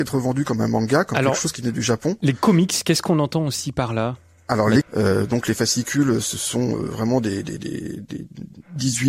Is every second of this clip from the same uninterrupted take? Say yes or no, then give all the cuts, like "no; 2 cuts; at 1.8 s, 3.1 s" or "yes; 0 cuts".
no; 1 cut; at 4.8 s